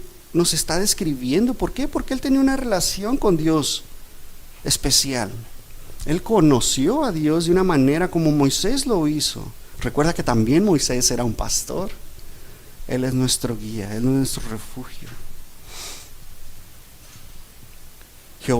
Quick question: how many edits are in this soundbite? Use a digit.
1